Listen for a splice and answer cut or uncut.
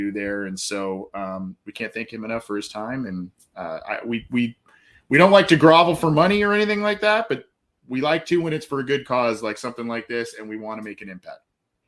uncut